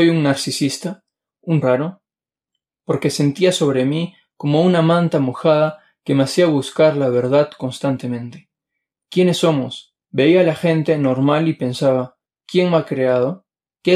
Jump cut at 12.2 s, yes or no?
yes